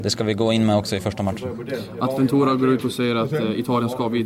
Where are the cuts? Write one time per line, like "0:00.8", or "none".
none